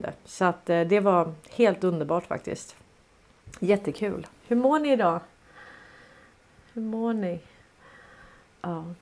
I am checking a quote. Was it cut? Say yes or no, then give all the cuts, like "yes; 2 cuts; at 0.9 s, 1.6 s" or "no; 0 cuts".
no; 0 cuts